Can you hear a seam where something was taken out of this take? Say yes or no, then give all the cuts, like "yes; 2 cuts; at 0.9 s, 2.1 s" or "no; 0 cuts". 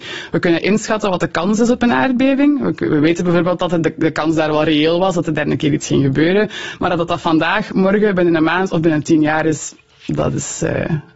no; 0 cuts